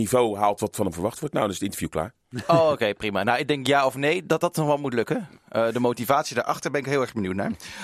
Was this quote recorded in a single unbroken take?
yes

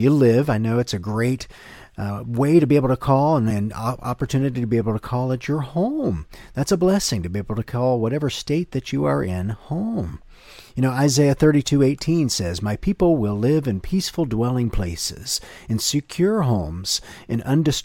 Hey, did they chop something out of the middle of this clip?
no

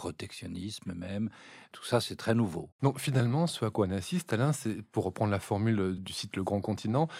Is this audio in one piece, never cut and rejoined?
no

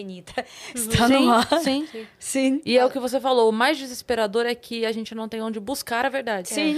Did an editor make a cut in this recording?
no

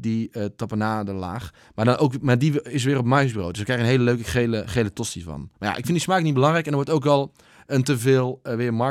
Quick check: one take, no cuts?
yes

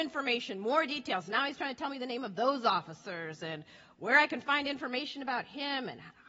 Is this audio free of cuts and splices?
yes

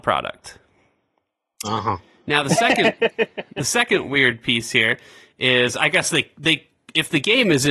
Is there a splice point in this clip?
no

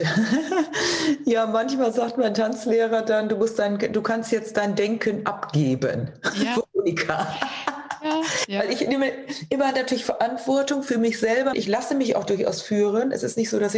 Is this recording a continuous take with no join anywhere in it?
no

